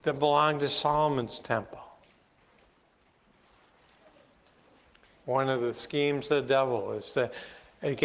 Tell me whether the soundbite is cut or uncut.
uncut